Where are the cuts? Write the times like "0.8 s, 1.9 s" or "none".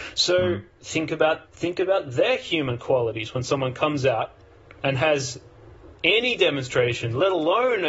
1.4 s, 4.8 s